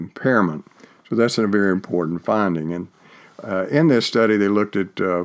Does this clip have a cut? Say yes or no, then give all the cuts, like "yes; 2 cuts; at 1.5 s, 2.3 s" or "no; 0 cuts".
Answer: no; 0 cuts